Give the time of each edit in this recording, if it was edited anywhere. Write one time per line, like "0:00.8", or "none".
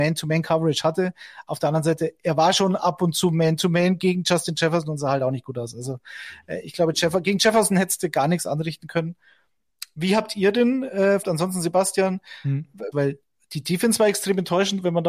0:11.2
0:12.9